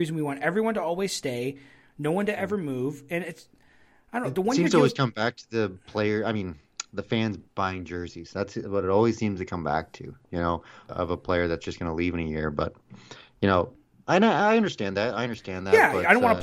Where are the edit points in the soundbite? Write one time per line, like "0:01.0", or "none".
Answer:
0:10.9